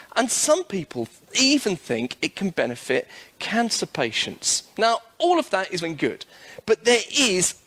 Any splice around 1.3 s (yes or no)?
no